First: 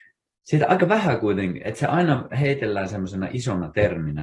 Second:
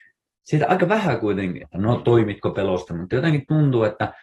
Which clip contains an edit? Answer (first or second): second